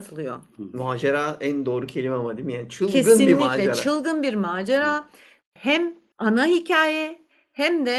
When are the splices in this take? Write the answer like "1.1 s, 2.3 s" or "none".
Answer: 5.4 s